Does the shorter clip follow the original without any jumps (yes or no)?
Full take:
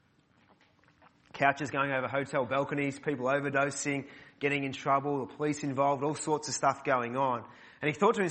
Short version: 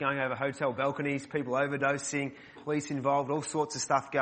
no